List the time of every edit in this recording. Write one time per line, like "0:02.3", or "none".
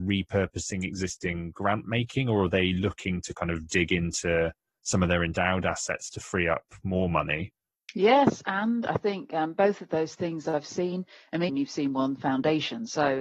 0:11.5